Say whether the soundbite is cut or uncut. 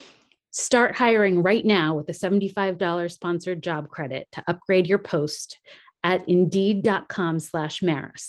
uncut